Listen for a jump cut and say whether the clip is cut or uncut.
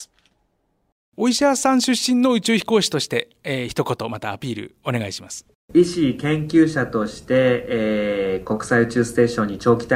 uncut